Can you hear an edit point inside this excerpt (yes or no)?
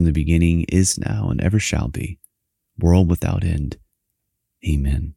no